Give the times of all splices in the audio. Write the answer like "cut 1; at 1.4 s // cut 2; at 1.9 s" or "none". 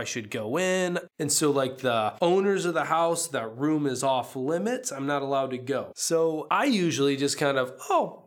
cut 1; at 1.1 s